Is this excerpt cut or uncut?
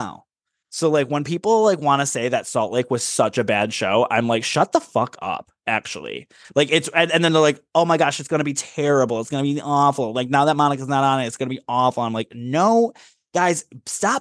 uncut